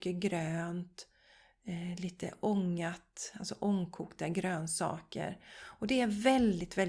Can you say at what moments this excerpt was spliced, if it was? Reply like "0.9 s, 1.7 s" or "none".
none